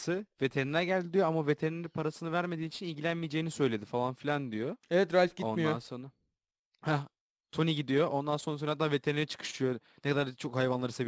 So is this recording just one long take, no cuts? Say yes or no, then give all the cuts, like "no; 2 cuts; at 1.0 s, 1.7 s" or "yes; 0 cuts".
yes; 0 cuts